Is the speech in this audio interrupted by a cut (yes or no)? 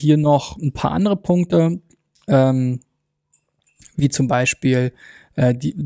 no